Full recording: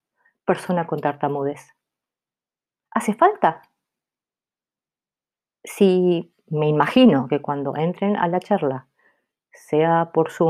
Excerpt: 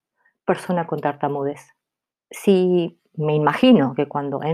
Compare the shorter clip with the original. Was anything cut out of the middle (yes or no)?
yes